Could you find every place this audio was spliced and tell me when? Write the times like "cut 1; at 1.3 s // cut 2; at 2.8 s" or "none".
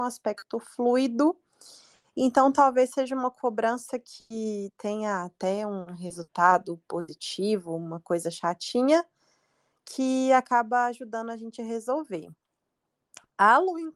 none